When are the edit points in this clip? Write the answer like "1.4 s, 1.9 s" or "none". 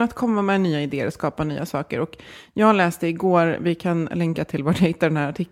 none